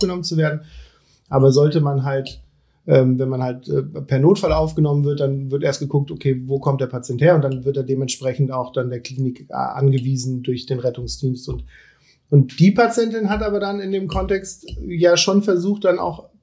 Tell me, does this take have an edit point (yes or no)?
no